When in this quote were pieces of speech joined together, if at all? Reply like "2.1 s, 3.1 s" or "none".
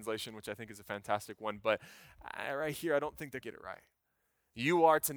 3.4 s